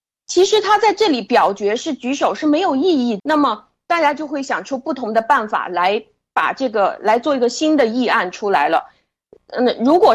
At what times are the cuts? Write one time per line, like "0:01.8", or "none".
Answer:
0:03.2

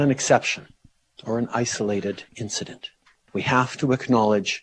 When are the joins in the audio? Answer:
0:03.3

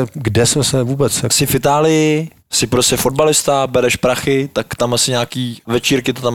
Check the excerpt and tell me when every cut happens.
0:02.4

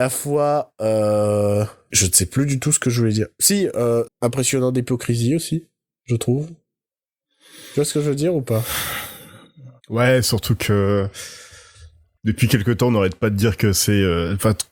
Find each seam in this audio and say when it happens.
0:01.9
0:04.1
0:09.8

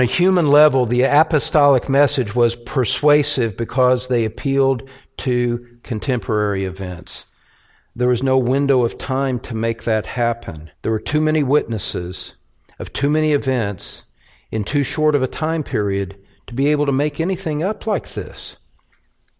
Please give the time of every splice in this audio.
0:07.9
0:10.7

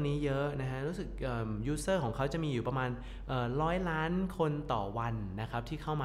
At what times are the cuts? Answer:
none

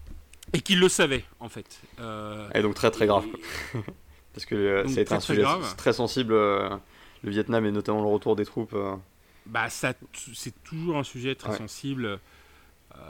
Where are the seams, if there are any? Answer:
none

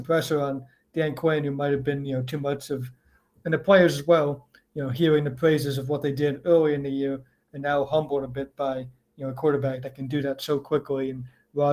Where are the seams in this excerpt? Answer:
none

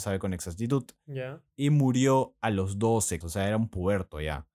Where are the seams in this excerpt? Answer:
0:03.2

